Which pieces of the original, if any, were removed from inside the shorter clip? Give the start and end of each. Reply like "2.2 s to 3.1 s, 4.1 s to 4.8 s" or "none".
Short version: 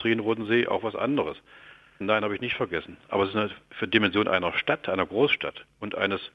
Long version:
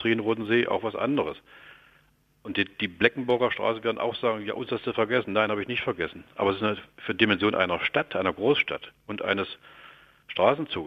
2.0 s to 5.3 s